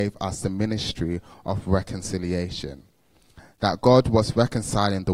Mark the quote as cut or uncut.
uncut